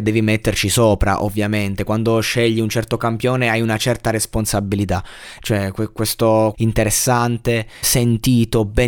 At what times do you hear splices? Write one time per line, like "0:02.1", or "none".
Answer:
0:05.4
0:06.5
0:07.8